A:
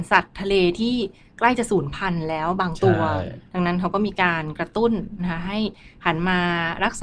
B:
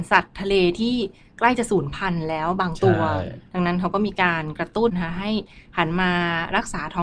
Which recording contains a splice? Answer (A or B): B